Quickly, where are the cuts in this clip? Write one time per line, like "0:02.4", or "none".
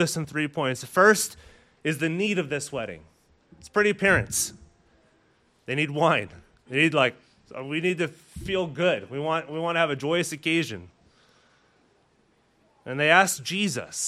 none